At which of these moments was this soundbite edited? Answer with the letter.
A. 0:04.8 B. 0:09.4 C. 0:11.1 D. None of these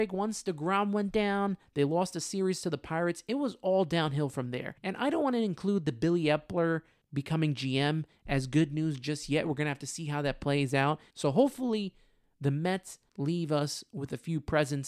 C